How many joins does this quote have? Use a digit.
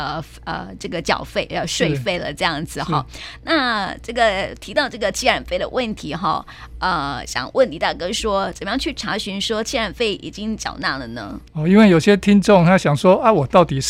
1